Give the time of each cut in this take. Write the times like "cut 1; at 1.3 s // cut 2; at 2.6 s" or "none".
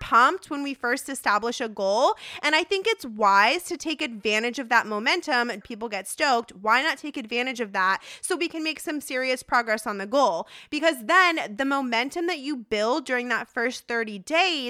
cut 1; at 5.6 s

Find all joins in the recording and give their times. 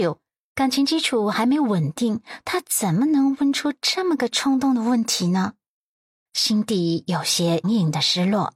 cut 1; at 6.3 s // cut 2; at 7.6 s

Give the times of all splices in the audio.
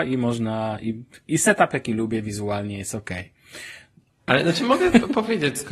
cut 1; at 4.3 s

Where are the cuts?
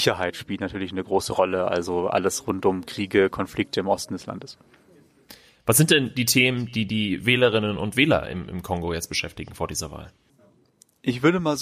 none

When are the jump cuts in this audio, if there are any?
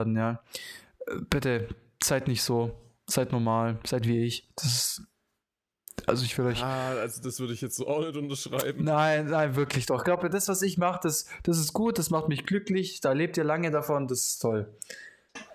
none

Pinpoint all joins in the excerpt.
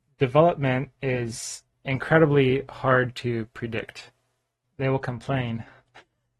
cut 1; at 4.6 s

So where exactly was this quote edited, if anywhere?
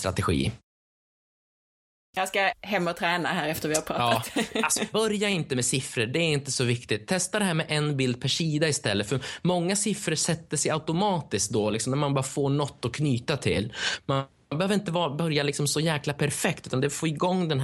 cut 1; at 4.9 s

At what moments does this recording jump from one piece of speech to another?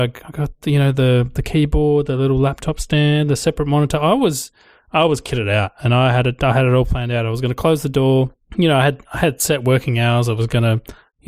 none

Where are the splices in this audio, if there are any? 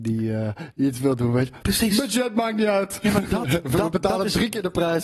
none

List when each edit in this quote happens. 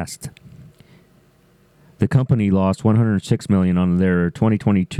none

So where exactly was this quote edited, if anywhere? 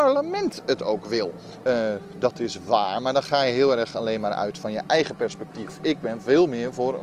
cut 1; at 1.6 s

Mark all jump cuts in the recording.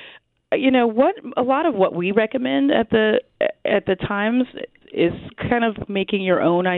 cut 1; at 4.8 s // cut 2; at 5.9 s

